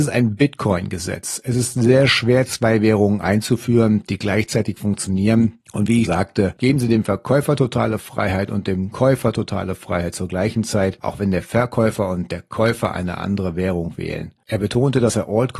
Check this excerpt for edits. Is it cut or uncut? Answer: cut